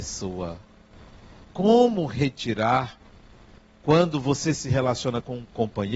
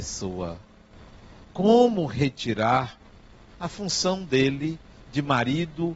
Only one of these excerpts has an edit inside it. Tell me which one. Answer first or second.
second